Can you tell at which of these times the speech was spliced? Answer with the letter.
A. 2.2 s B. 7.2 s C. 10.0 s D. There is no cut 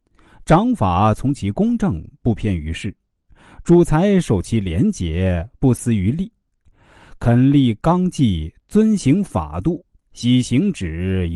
C